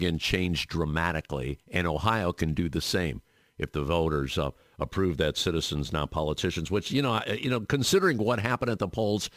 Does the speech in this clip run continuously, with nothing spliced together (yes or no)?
yes